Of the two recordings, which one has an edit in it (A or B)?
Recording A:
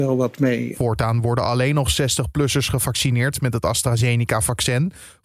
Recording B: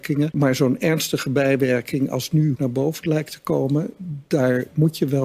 B